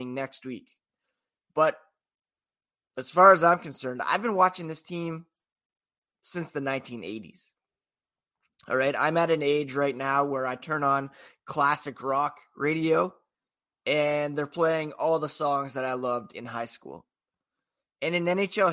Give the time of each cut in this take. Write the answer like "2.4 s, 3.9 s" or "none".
17.8 s